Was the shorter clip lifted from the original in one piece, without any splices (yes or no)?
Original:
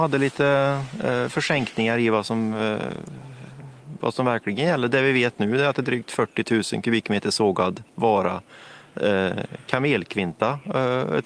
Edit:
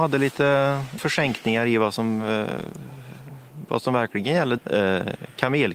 no